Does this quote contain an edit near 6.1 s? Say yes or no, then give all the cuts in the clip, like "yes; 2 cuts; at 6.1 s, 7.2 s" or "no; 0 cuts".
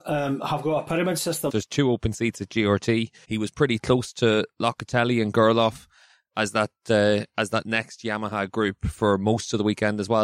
no; 2 cuts; at 1.5 s, 3.2 s